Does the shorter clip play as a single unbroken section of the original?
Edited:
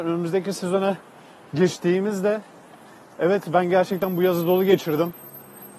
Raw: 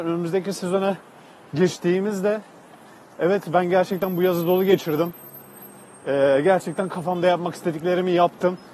yes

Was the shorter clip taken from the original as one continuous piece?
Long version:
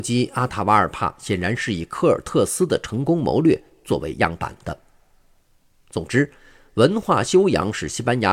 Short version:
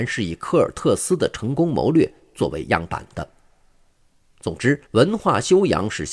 no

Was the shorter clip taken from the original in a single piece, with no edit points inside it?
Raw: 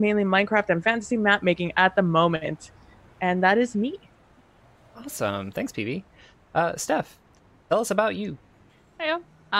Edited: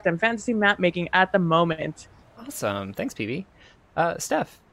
no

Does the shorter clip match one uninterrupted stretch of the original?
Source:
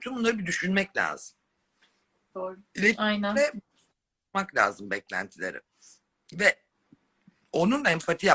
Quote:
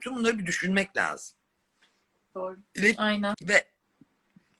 no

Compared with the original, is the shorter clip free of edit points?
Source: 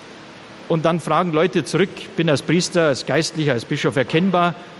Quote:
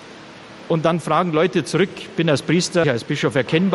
no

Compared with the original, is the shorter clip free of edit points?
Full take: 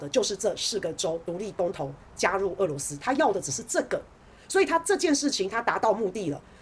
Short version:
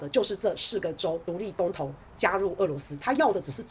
yes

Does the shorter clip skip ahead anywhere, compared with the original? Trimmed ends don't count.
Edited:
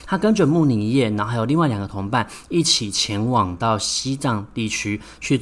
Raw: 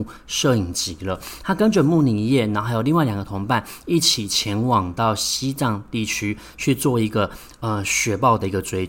no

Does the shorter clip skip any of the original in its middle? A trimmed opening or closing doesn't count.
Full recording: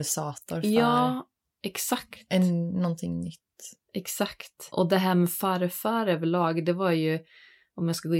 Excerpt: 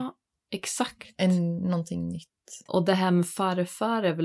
yes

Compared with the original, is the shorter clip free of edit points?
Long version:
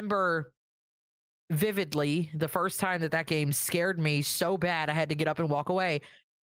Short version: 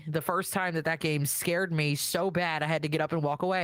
yes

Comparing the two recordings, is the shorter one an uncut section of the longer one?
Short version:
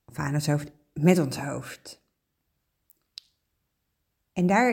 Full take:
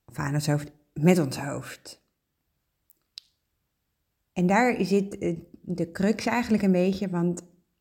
yes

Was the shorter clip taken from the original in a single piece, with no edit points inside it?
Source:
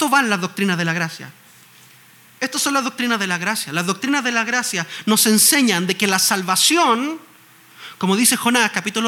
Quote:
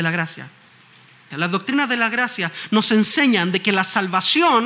no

